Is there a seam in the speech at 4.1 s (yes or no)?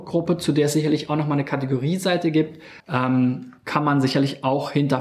no